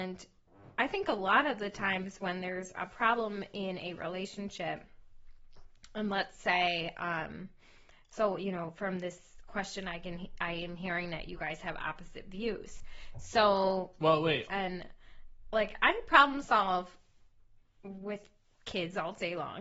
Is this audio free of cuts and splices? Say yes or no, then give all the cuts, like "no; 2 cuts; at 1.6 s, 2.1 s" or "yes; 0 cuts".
no; 1 cut; at 14.5 s